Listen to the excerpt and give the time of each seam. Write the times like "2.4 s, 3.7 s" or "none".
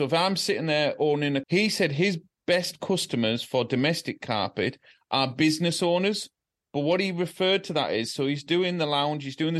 1.4 s